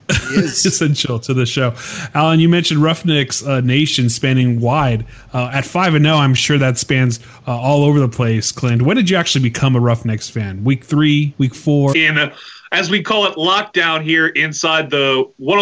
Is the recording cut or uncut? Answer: cut